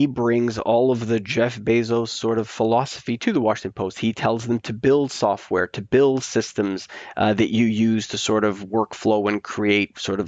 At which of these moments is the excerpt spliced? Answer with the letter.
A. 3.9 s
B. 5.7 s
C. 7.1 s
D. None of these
D